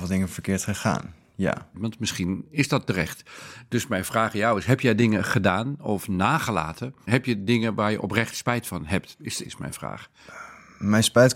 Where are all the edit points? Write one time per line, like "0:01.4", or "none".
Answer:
0:01.7
0:07.1
0:09.4